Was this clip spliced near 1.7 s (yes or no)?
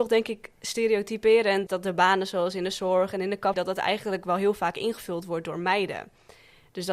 yes